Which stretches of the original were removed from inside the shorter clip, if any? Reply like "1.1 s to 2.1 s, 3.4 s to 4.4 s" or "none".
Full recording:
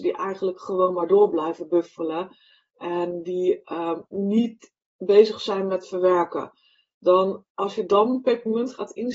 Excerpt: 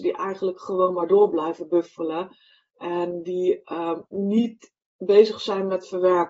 none